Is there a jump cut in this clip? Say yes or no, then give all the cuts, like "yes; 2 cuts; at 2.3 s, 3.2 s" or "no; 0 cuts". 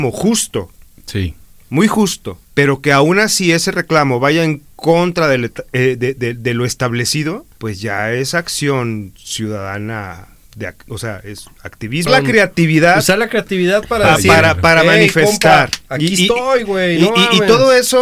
yes; 1 cut; at 12.1 s